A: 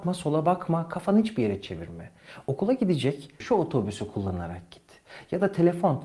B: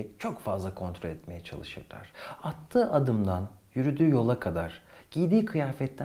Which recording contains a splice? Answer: A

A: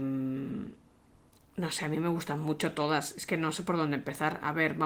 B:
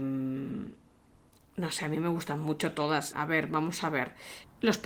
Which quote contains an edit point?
B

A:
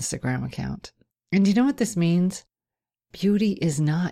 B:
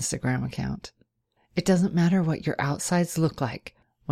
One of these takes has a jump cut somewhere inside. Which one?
A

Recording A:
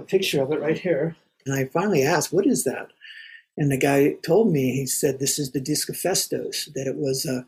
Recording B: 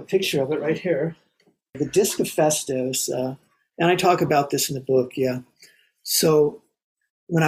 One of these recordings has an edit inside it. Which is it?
A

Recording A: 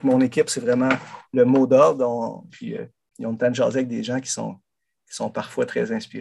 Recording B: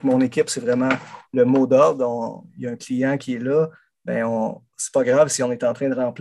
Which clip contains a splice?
A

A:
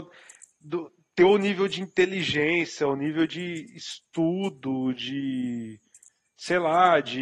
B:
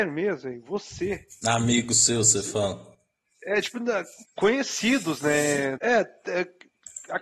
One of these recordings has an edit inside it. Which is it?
B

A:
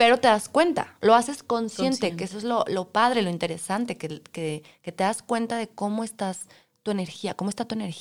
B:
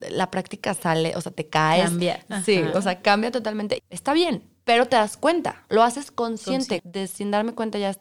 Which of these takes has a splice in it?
B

